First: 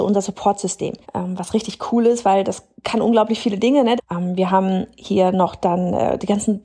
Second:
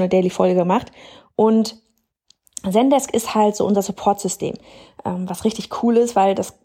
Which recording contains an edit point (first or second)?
first